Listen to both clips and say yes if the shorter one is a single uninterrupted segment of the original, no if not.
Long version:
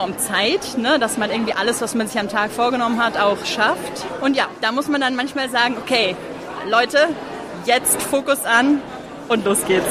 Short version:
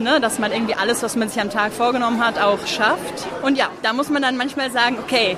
yes